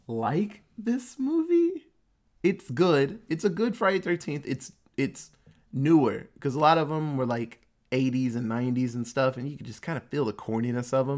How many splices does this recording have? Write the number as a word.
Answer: zero